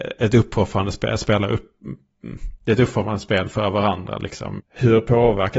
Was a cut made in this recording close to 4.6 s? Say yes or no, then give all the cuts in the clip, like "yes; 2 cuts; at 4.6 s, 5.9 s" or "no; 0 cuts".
yes; 1 cut; at 4.6 s